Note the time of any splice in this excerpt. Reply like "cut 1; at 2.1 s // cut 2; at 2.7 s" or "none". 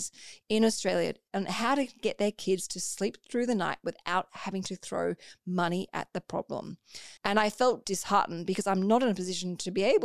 cut 1; at 7.2 s